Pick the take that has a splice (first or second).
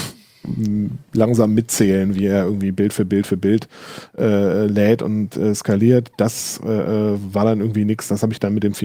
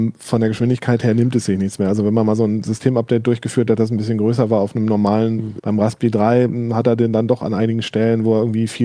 second